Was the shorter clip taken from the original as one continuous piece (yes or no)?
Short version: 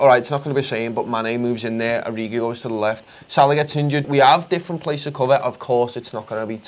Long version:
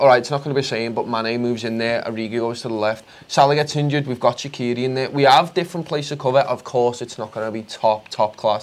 no